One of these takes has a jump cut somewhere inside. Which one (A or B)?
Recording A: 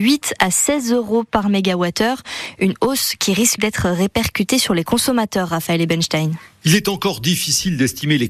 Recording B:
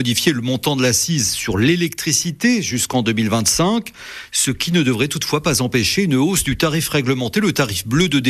A